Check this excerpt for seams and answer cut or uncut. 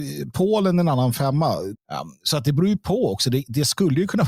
cut